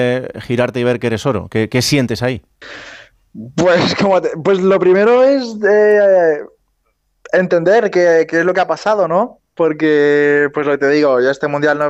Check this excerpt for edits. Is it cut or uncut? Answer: uncut